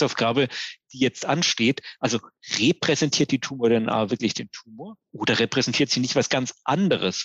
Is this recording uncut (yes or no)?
no